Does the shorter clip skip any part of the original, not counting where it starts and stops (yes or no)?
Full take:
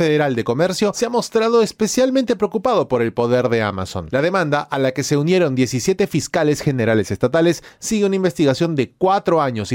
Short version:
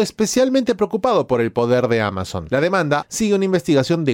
yes